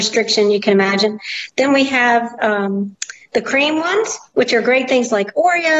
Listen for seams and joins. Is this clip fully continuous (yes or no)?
yes